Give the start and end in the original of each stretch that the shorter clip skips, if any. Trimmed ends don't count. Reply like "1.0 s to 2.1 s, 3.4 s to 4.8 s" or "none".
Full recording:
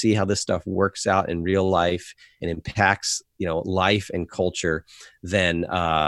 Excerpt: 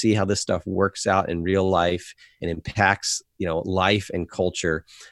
none